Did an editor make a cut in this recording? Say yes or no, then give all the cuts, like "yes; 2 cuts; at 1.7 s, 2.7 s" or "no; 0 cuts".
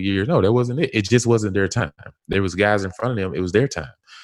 no; 0 cuts